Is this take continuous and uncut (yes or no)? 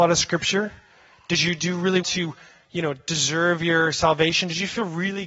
no